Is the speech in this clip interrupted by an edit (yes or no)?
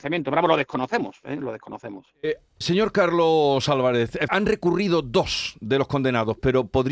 yes